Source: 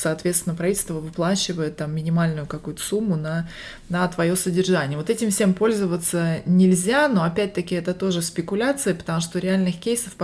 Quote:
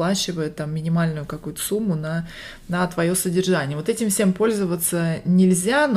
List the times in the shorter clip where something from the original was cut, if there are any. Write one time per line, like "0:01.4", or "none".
none